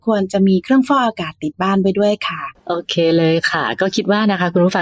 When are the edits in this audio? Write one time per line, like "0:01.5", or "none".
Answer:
0:02.6

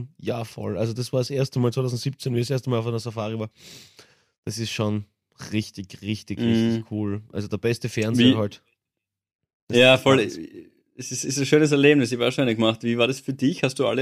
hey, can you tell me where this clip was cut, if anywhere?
none

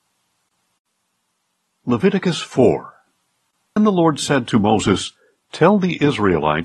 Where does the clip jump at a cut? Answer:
0:03.8

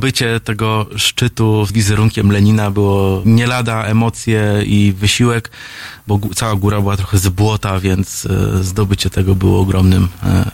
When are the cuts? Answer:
0:01.7
0:03.2

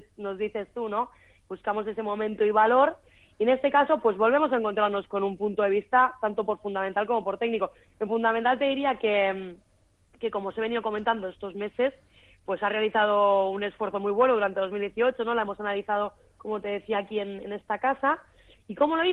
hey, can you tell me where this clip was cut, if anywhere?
none

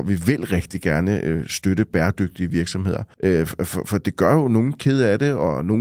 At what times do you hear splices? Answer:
0:03.1

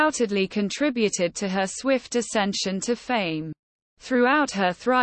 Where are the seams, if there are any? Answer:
none

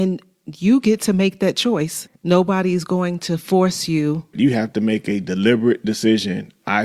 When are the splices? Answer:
0:02.1
0:04.3

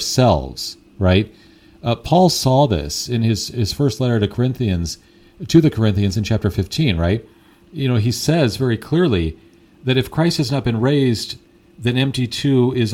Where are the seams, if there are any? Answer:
none

